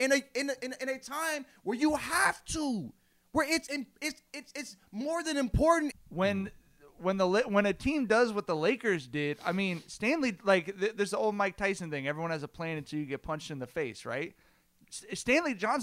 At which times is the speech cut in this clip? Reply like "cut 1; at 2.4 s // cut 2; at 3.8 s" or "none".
cut 1; at 5.9 s